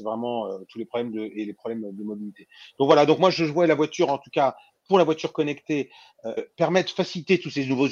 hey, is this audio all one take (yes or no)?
no